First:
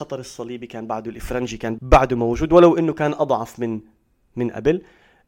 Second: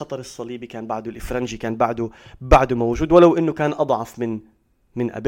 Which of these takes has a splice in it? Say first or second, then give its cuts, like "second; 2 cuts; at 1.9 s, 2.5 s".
first; 1 cut; at 1.8 s